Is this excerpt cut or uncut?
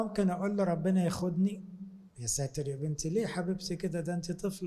cut